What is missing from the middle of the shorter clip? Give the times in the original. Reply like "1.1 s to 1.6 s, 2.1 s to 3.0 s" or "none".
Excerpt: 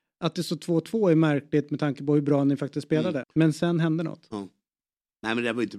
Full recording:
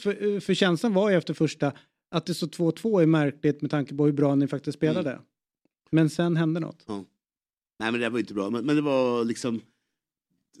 5.1 s to 5.8 s